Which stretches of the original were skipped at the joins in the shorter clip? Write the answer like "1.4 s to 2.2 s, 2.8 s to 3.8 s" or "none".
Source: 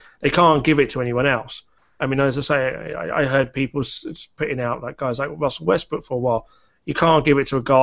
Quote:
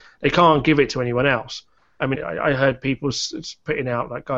2.1 s to 2.9 s